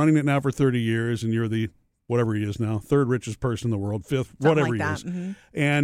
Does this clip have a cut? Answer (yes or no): no